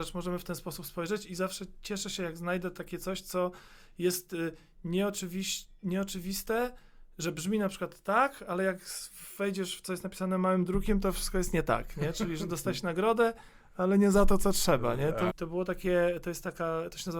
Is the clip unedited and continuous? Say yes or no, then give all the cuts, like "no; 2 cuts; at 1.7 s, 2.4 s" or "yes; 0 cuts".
no; 1 cut; at 15.3 s